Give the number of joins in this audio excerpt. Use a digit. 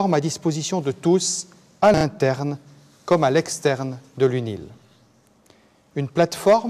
0